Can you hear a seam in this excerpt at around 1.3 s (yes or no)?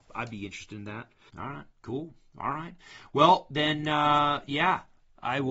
yes